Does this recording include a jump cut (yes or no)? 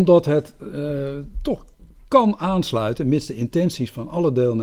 no